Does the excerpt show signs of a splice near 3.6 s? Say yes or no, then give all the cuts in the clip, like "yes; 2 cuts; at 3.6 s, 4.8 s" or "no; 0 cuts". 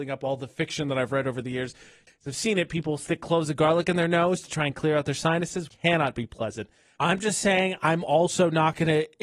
no; 3 cuts; at 2.1 s, 5.7 s, 7.0 s